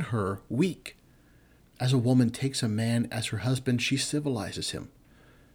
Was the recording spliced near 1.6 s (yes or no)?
yes